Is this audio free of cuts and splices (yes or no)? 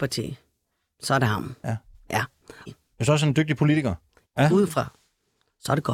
no